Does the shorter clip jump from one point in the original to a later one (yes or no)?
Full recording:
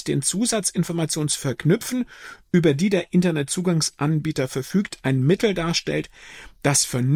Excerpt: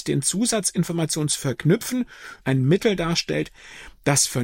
yes